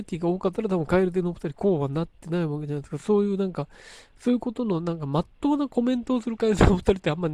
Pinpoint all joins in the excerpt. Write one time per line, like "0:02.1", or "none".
none